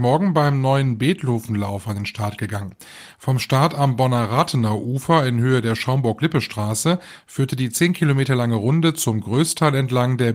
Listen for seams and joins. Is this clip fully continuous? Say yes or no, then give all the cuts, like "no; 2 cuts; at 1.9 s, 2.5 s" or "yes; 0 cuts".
yes; 0 cuts